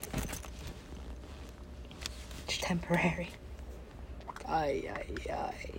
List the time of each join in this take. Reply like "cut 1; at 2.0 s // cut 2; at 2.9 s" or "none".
cut 1; at 2.6 s // cut 2; at 4.4 s